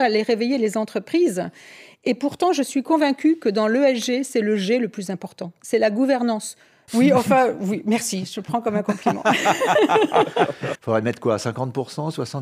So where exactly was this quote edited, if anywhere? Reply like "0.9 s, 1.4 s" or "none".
6.9 s, 10.8 s